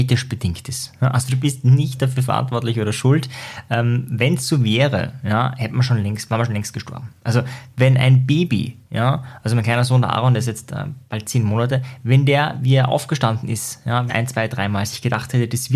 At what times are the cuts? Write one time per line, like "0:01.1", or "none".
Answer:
0:14.1